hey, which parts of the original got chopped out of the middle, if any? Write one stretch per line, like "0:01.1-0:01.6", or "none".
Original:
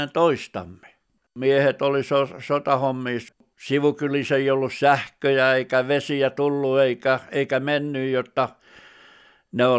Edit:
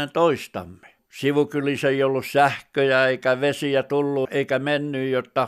0:01.0-0:03.5
0:06.7-0:07.3

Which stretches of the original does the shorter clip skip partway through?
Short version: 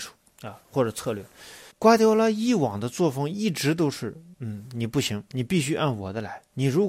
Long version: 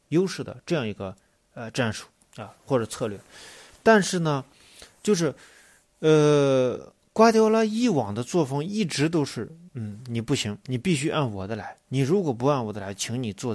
0:03.7-0:07.1

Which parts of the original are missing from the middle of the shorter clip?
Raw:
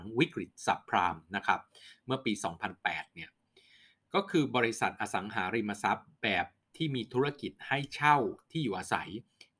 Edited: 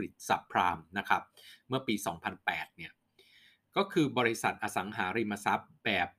none

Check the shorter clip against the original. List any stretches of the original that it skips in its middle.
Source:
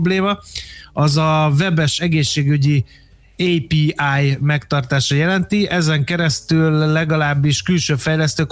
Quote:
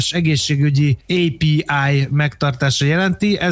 0:02.9-0:03.3

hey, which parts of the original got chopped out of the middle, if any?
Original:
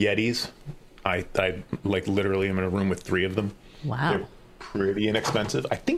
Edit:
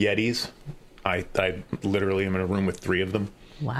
0:01.8-0:02.0

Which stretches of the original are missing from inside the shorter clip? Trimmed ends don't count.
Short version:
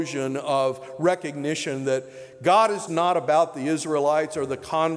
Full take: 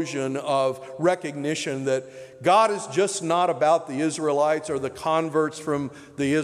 0:02.9-0:03.2

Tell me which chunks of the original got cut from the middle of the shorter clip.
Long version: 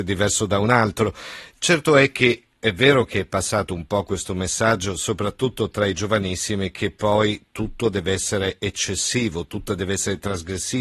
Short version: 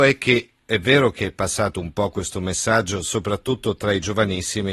none

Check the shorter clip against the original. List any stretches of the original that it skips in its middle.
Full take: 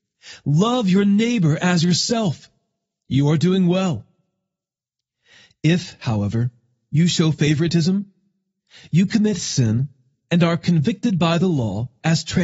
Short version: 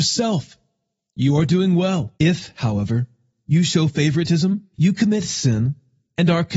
0:04.1-0:05.6
0:08.2-0:08.9

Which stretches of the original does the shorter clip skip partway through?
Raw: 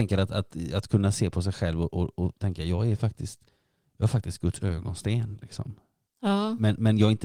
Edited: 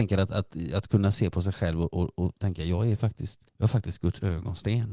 0:03.5-0:03.9

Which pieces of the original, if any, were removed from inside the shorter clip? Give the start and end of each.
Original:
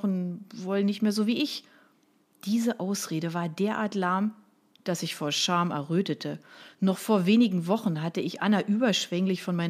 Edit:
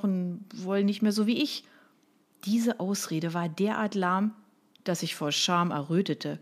none

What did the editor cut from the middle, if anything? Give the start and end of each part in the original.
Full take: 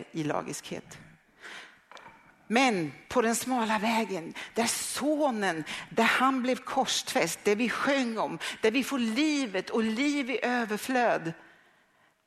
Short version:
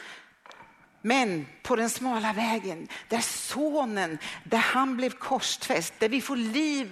0:07.4-0:08.6

